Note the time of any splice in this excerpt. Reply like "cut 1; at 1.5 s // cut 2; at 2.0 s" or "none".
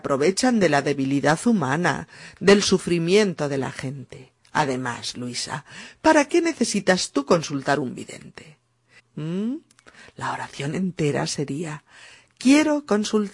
cut 1; at 9.0 s

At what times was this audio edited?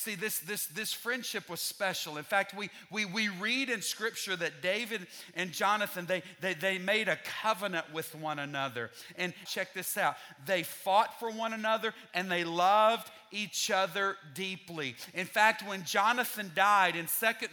cut 1; at 9.5 s // cut 2; at 12.1 s

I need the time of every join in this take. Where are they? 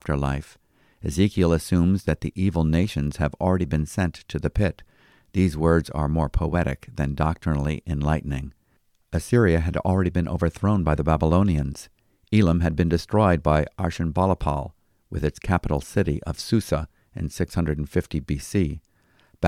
none

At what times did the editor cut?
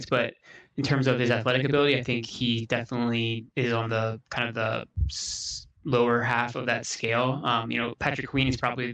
cut 1; at 3.5 s

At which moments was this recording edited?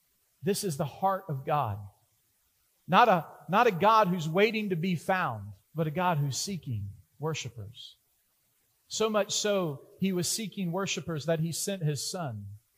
cut 1; at 5.6 s

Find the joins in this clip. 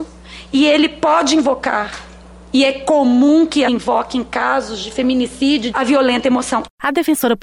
cut 1; at 3.7 s // cut 2; at 5.7 s

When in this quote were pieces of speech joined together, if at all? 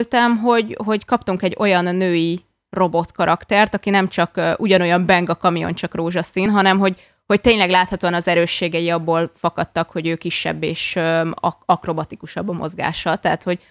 none

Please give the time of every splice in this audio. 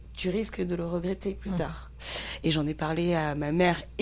none

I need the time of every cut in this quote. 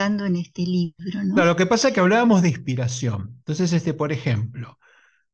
none

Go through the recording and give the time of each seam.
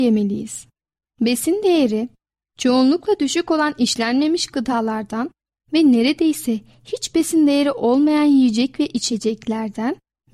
cut 1; at 1.1 s

